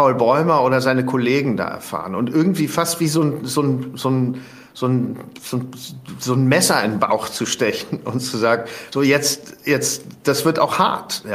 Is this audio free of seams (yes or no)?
yes